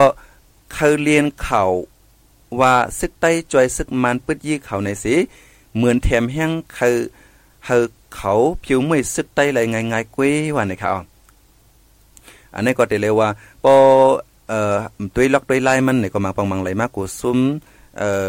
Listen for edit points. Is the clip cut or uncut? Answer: uncut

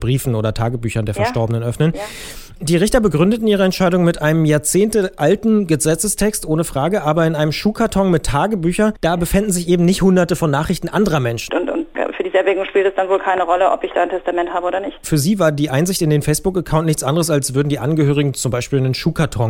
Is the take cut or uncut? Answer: cut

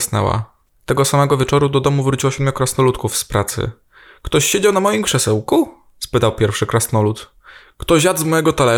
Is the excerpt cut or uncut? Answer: uncut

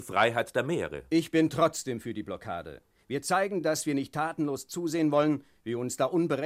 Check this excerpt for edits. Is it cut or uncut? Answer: uncut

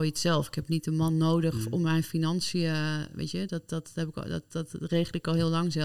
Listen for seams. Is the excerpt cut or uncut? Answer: uncut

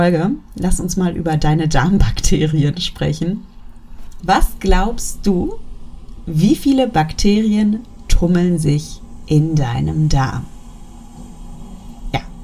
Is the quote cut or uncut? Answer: cut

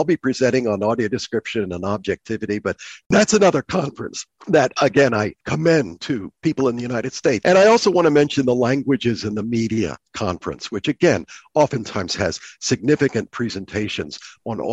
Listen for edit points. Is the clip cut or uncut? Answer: cut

